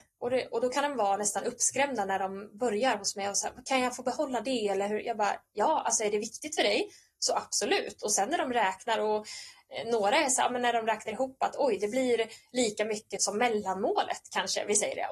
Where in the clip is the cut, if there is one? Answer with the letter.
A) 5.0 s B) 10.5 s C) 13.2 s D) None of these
C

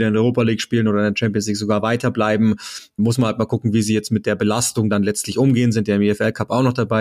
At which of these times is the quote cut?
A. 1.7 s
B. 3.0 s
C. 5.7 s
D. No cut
B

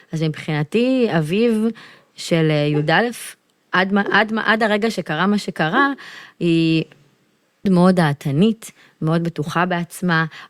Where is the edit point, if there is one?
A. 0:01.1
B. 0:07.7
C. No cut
B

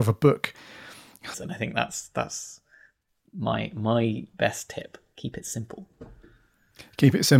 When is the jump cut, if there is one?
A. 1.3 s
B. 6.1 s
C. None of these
A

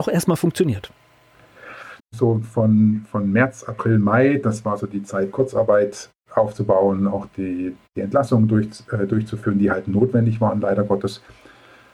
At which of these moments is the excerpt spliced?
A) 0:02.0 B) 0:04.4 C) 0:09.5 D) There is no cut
A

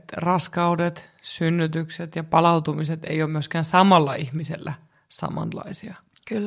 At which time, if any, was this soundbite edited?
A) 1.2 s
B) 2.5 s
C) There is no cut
C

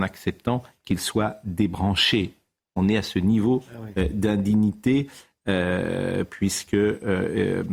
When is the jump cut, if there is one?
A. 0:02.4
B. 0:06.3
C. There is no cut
C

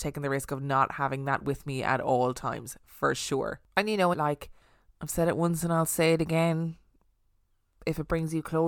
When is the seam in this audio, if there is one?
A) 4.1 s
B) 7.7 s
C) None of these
A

